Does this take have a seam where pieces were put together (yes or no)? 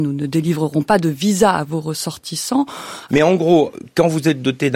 yes